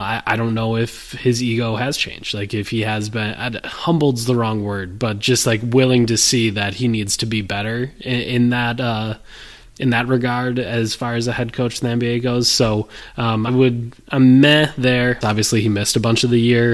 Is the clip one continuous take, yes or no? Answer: no